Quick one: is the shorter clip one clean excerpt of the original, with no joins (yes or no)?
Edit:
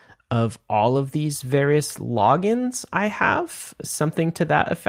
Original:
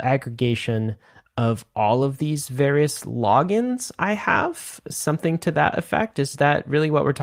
yes